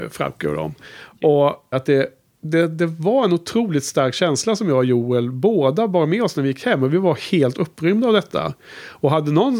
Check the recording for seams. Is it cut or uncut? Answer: cut